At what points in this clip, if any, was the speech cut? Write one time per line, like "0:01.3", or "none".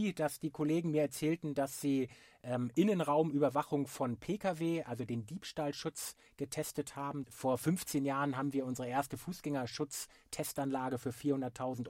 0:07.2